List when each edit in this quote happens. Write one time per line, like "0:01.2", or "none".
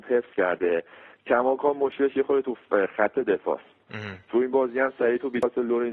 none

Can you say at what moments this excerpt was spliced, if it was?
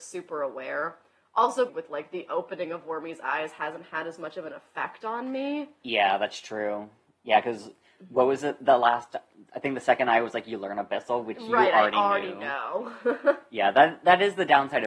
0:01.7

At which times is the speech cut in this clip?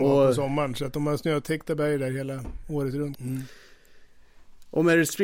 0:03.1

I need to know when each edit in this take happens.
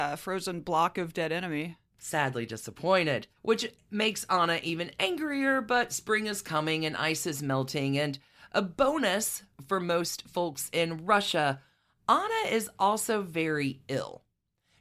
0:03.4

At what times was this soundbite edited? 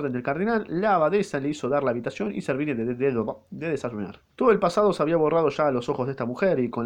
0:04.3

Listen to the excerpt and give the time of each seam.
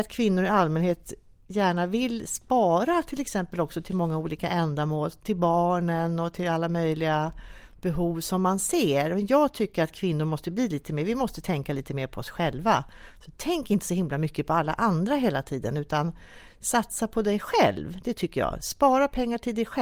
none

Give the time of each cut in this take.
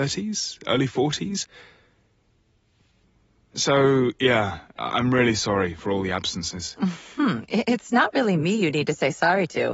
none

